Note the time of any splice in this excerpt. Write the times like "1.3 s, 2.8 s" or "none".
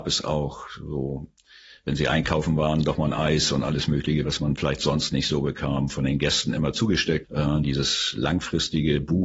7.2 s